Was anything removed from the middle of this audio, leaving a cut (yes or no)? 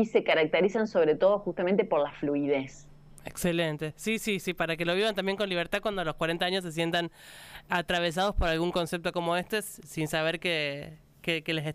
yes